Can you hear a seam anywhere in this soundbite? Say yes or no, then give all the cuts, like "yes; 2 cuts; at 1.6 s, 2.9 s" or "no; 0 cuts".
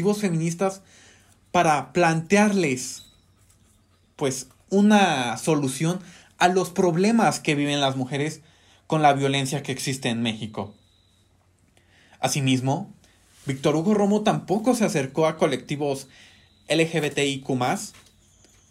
no; 0 cuts